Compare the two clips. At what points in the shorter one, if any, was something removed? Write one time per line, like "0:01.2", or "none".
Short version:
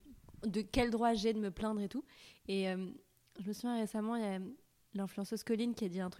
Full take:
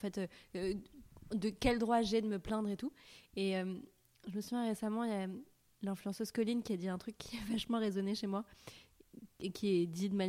none